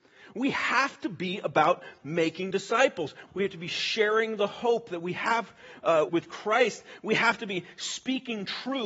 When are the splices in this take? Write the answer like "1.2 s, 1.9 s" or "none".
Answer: 3.3 s, 6.1 s